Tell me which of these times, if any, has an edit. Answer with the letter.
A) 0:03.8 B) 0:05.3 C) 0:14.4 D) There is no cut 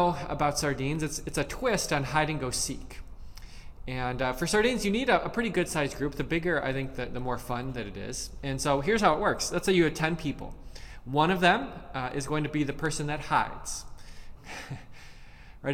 C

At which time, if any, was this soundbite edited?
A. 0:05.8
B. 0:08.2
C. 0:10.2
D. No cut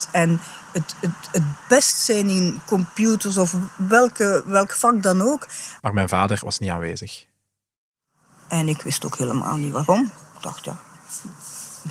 A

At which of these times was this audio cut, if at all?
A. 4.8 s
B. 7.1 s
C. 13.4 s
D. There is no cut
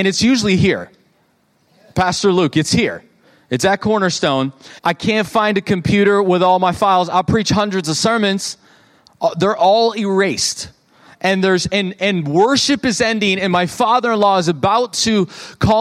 A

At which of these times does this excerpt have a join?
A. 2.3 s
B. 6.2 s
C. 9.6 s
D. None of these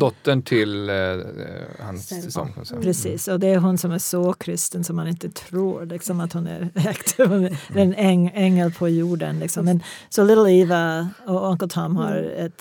A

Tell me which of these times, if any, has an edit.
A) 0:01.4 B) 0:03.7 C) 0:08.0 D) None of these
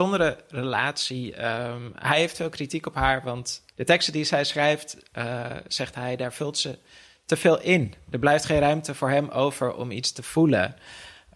B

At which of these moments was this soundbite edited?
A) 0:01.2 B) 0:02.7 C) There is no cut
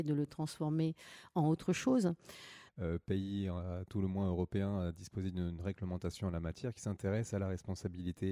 B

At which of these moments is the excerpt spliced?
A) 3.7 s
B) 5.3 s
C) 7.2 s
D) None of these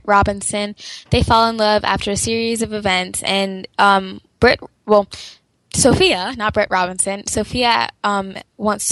D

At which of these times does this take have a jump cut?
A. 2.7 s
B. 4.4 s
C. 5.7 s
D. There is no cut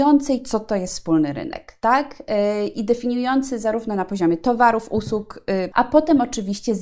C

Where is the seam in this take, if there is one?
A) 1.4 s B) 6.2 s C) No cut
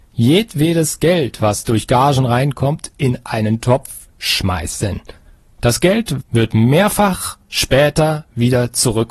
B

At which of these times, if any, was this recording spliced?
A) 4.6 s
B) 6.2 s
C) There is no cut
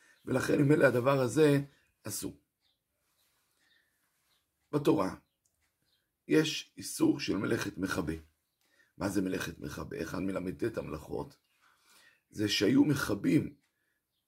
C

